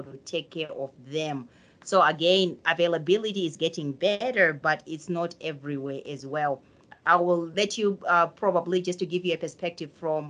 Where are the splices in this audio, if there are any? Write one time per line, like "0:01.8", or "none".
none